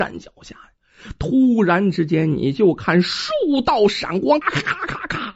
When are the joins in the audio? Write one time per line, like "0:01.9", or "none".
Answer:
0:04.4

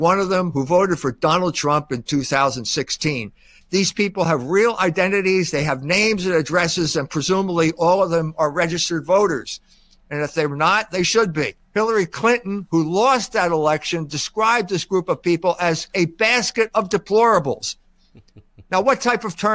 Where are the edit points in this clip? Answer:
0:03.6
0:11.6
0:15.9

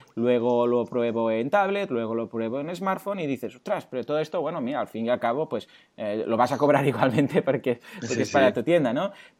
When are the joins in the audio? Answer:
none

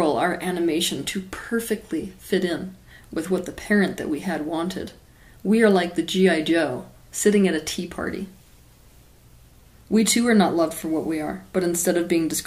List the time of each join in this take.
none

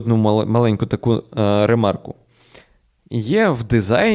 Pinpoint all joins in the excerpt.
none

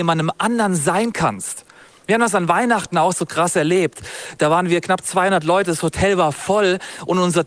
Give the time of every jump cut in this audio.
none

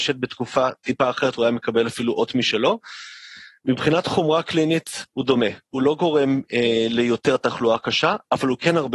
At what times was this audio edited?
none

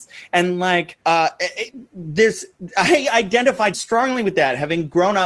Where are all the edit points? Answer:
0:01.0
0:03.7

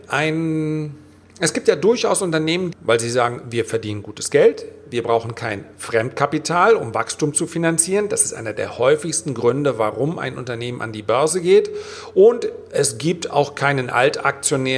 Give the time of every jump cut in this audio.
0:02.7

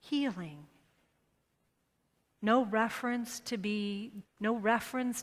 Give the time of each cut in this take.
0:04.2

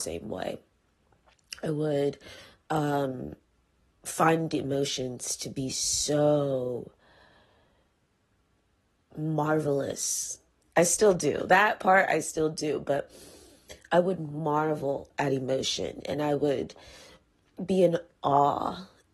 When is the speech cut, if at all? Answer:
none

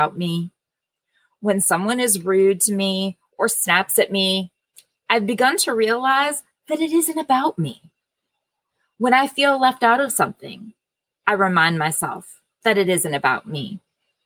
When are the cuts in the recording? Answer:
none

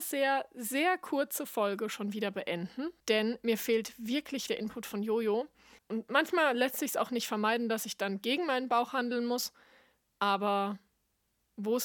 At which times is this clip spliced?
0:03.0
0:04.5
0:05.8

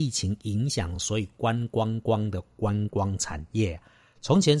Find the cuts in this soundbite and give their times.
none

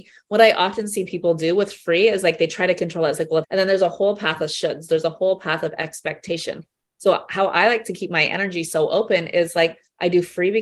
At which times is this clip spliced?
0:03.4

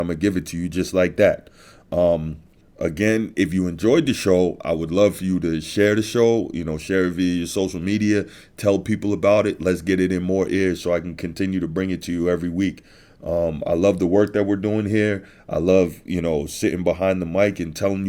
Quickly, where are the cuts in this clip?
none

